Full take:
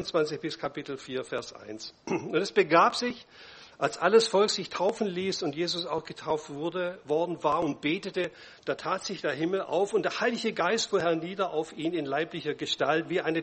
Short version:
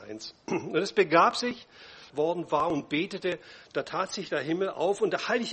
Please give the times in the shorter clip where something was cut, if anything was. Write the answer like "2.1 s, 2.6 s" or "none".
2.1 s

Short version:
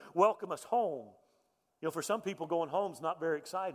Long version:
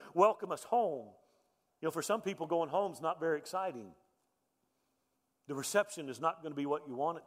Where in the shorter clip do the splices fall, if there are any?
none

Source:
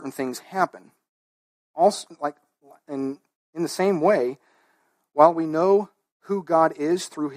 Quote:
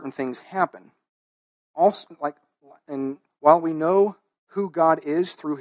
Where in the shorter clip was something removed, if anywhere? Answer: 3.3 s

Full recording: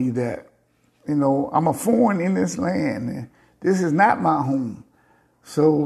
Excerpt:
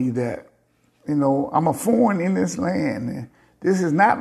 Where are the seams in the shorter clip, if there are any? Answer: none

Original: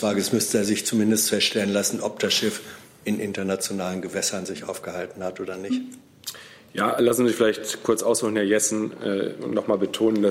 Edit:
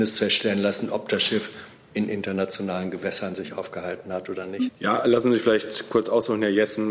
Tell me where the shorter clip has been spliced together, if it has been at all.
4.7 s

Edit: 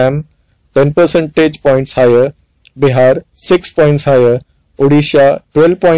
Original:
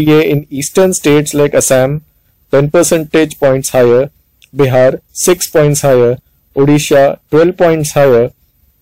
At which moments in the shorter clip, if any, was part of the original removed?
none

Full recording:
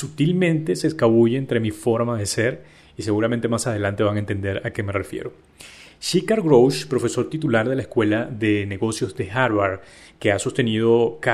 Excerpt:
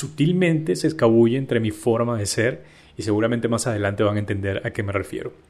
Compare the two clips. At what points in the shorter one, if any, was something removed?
none

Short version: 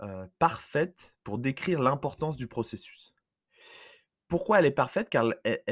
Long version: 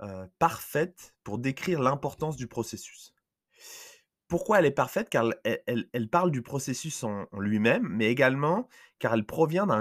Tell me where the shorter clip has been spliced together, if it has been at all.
none

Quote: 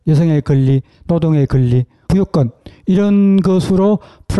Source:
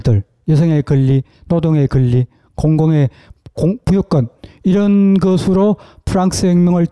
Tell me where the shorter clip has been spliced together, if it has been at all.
2.1 s

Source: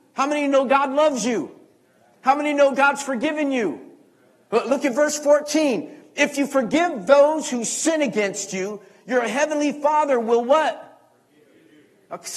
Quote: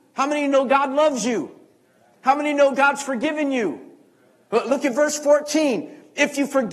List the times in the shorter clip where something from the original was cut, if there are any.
none

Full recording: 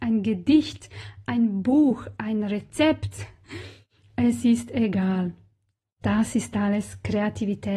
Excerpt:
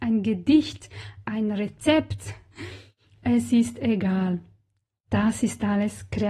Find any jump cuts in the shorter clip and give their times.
1.2 s

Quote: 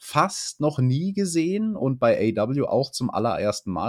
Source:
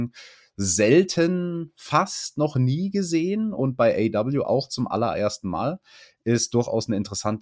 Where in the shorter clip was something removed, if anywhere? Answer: none

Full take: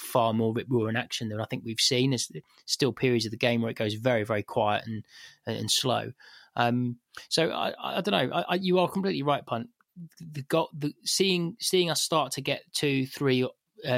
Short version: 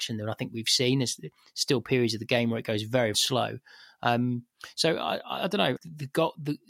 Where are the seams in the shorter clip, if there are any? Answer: 3.1 s, 5.8 s

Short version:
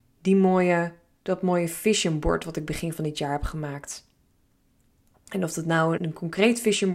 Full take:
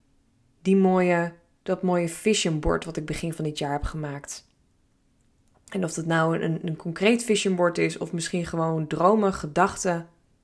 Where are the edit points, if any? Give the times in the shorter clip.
6.0 s

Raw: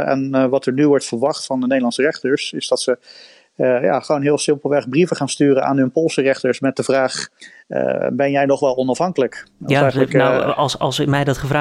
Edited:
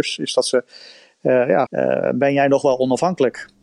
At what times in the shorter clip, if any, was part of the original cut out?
1.7 s

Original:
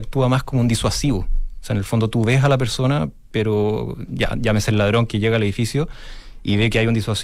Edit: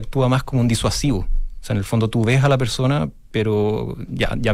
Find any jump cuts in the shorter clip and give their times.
none

